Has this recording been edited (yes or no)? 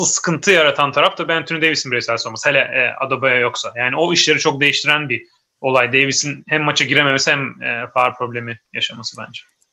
no